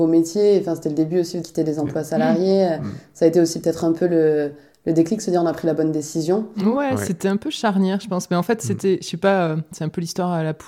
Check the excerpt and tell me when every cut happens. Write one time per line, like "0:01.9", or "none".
0:01.4